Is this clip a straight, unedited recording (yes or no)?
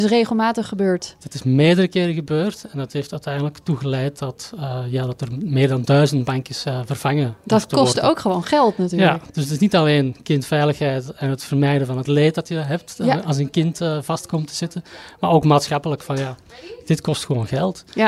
yes